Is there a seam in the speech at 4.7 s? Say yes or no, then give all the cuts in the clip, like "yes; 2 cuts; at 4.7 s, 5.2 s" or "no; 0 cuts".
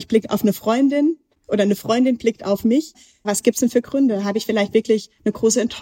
no; 1 cut; at 3.2 s